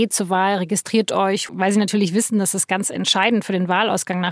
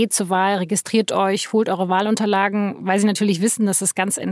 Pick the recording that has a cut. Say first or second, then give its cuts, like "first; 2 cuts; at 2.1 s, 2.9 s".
first; 1 cut; at 1.5 s